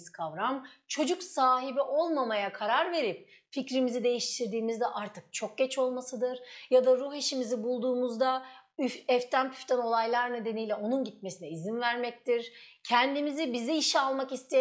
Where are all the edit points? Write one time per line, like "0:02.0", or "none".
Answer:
none

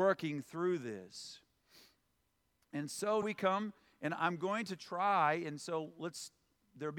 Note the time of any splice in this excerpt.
0:03.2

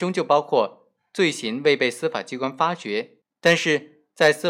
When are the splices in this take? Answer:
0:03.2

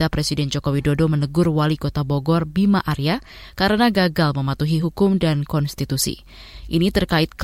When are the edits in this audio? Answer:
none

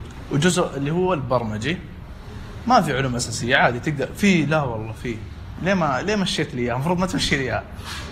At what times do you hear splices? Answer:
none

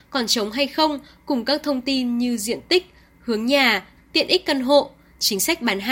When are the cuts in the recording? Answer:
0:04.0

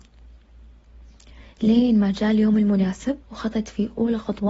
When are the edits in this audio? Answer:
0:03.2

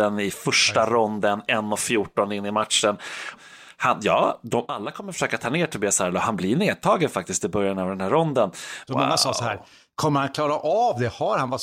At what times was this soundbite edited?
0:03.3
0:08.9

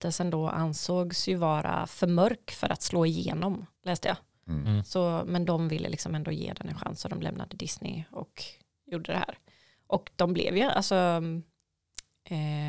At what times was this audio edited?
0:03.8

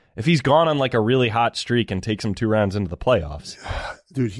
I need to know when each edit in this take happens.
none

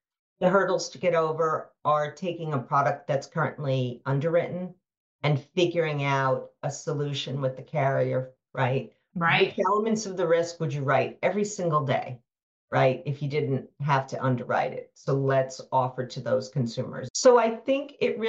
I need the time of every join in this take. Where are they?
0:08.5
0:17.1

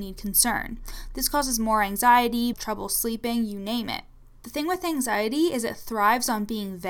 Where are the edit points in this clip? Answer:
0:02.5

